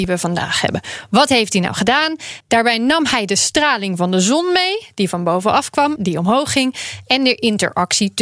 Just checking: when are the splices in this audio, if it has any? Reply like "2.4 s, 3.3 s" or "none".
2.4 s, 6.0 s